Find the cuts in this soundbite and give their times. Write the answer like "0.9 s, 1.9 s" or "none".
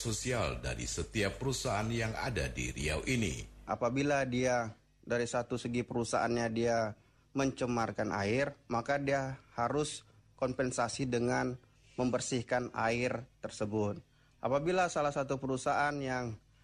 3.7 s